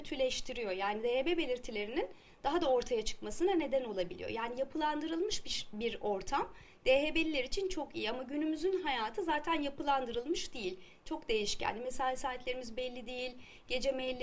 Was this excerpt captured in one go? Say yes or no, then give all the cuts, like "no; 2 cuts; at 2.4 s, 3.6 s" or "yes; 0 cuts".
yes; 0 cuts